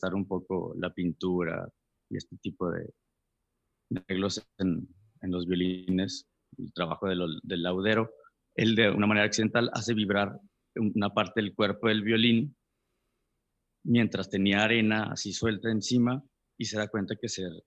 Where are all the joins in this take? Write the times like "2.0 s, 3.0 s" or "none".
none